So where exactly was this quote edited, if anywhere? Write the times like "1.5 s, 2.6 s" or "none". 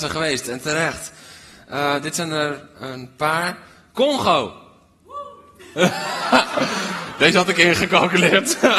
none